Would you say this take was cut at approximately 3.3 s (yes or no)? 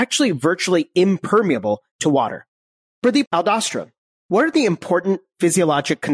yes